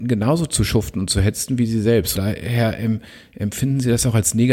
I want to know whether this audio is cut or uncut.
cut